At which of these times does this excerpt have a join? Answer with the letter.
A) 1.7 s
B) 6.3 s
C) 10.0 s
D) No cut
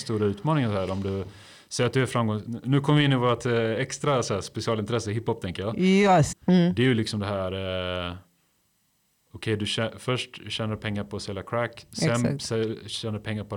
B